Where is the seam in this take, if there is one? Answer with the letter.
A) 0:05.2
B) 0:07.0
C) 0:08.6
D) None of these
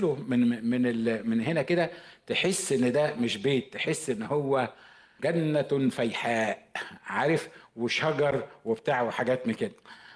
A